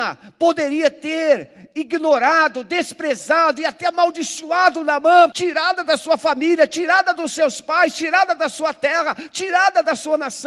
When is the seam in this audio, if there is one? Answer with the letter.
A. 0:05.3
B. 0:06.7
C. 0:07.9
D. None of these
A